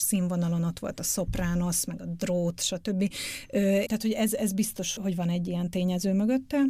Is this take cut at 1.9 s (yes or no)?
no